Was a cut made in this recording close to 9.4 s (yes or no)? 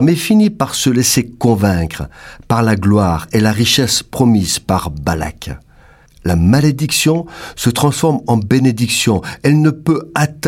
no